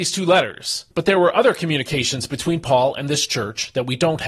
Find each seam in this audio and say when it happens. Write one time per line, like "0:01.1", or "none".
0:00.9